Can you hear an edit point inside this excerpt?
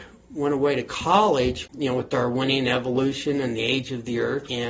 yes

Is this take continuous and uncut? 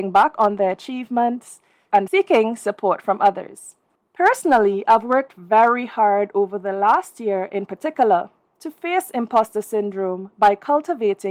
no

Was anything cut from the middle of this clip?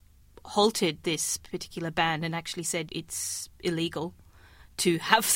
yes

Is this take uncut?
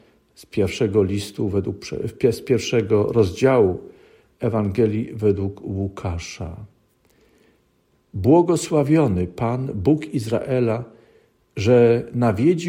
yes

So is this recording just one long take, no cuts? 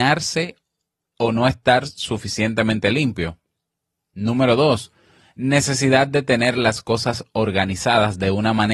yes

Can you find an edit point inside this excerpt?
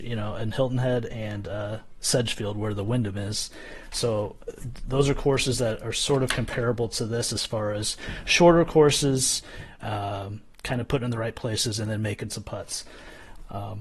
yes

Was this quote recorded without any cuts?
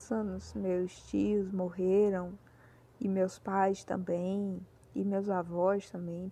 yes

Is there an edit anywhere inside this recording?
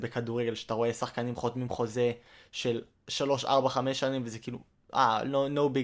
no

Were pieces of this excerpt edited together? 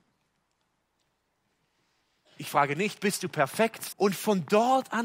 yes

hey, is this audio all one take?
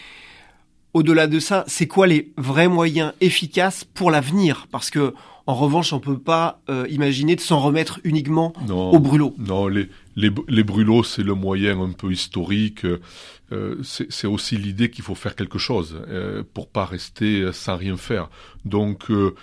yes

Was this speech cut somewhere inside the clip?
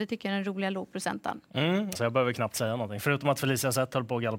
yes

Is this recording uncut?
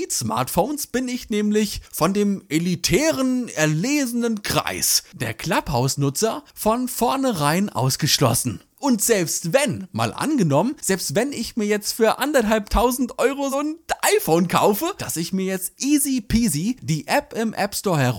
no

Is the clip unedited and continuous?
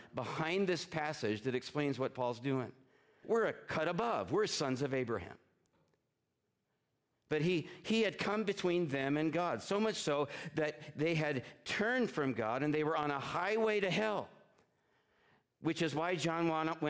no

